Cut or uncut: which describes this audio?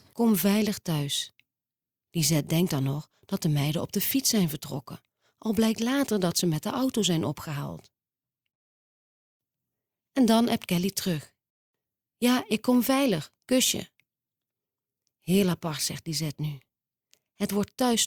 uncut